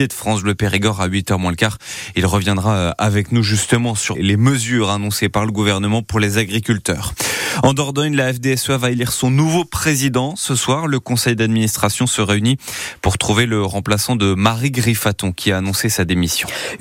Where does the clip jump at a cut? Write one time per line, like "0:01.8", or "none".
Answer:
0:04.1